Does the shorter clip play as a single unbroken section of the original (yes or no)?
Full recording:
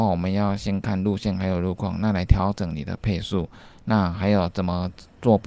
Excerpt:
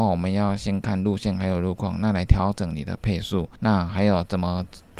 no